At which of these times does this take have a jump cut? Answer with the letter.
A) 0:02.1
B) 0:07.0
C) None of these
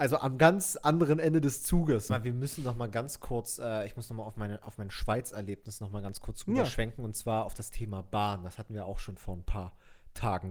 A